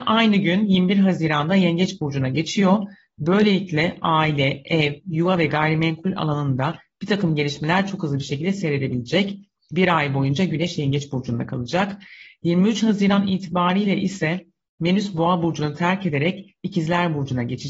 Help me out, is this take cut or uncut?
uncut